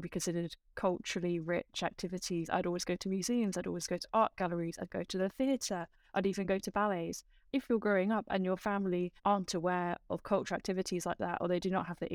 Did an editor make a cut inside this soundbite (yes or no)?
yes